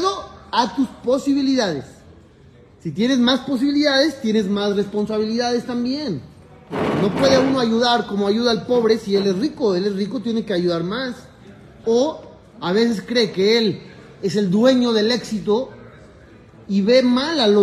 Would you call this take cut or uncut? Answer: cut